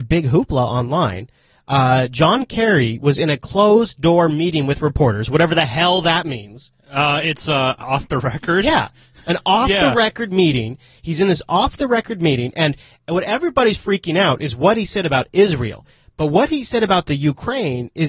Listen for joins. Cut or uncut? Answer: uncut